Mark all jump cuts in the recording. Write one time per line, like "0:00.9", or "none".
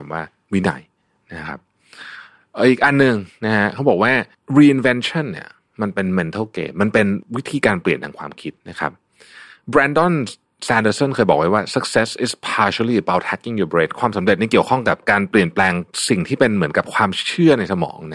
0:08.6